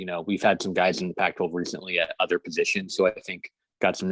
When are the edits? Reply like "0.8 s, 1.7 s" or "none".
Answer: none